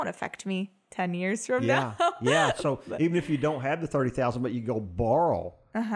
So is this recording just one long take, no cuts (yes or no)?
yes